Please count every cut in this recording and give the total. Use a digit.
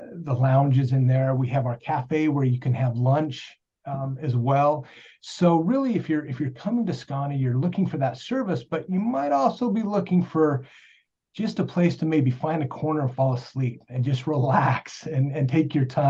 0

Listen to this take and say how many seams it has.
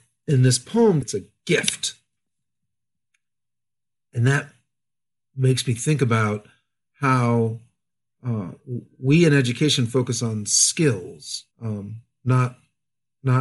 2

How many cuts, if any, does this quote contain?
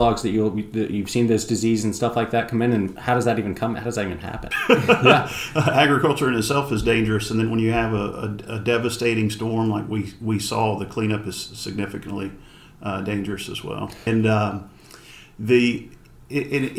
2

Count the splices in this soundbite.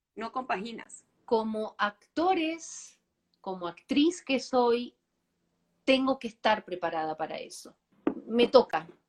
1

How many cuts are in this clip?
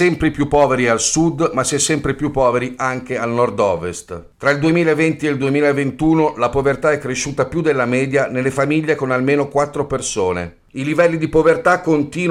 0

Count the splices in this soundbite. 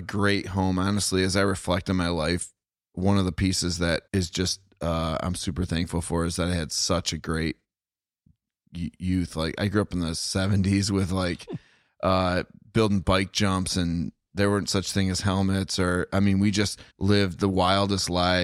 2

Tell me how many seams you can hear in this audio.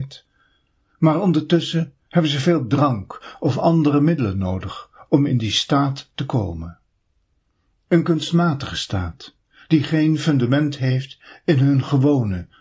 0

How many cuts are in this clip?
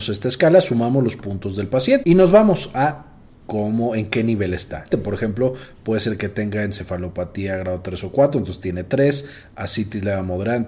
2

